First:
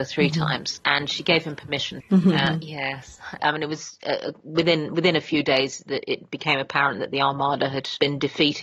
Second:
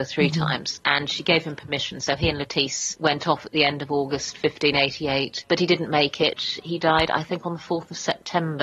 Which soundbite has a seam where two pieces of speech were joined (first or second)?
first